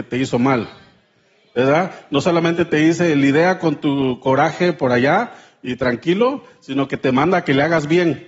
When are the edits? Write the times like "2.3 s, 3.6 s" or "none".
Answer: none